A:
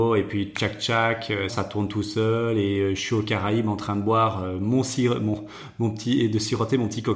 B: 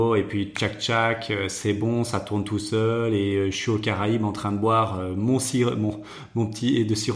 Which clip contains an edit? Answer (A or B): A